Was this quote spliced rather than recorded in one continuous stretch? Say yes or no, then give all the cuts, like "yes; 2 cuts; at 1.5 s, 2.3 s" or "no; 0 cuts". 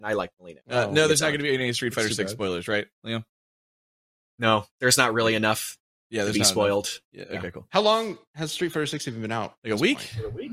no; 0 cuts